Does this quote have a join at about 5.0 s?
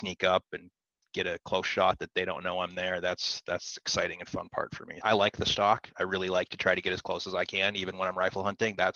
yes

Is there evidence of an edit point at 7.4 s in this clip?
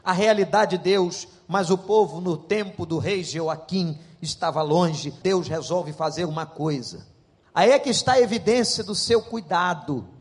yes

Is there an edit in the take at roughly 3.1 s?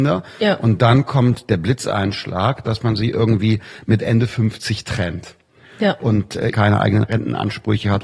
no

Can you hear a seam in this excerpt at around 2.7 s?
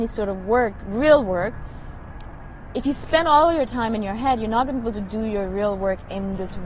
no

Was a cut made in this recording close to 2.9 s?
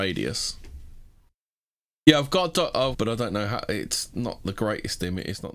yes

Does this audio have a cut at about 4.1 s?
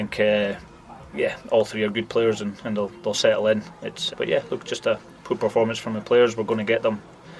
yes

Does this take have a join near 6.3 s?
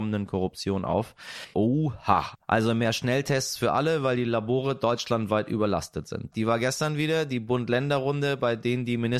yes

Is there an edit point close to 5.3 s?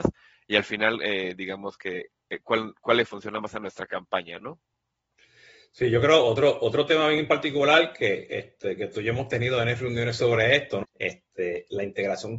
no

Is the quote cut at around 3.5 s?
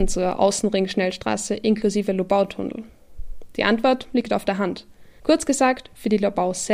no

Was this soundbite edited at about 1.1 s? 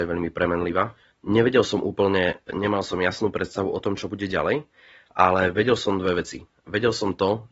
yes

